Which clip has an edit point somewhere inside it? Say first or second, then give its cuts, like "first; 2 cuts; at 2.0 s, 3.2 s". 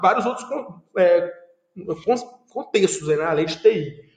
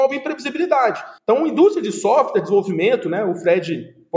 second; 1 cut; at 1.2 s